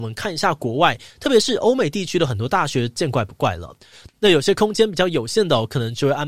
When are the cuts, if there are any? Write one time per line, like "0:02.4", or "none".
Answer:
0:03.0
0:04.1